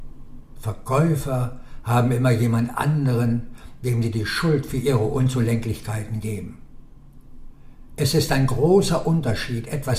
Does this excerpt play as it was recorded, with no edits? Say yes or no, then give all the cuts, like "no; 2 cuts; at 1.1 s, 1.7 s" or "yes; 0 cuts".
yes; 0 cuts